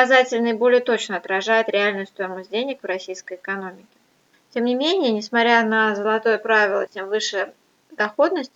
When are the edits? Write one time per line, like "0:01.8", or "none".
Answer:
0:04.3
0:06.9